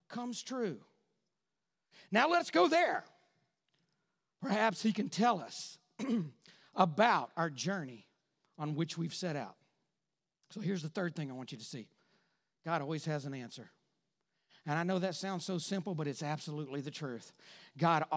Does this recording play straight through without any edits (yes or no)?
yes